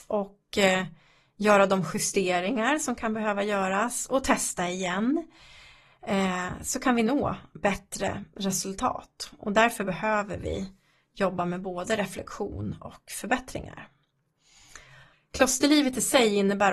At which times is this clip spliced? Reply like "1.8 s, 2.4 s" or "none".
15.1 s

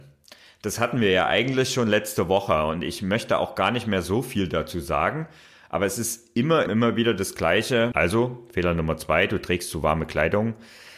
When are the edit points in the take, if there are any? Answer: 6.7 s, 7.9 s

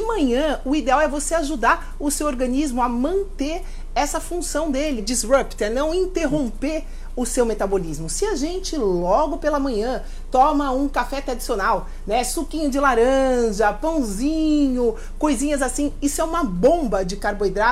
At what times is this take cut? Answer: 5.0 s

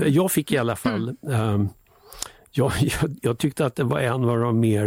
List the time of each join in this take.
none

